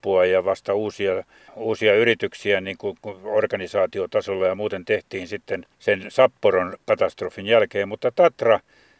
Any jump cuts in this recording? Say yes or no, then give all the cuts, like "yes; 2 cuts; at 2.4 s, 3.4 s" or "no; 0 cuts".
yes; 1 cut; at 5.7 s